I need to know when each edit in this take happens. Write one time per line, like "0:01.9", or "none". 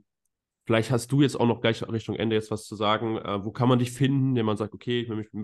none